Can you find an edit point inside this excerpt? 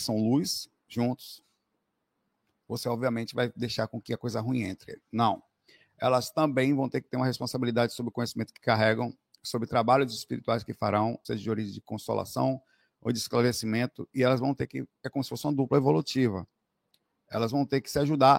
yes; 2 cuts; at 5.0 s, 11.2 s

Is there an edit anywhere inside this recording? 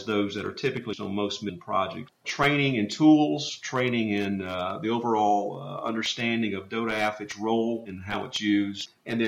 yes; 1 cut; at 2.2 s

